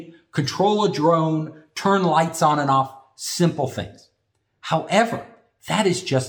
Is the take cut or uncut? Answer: uncut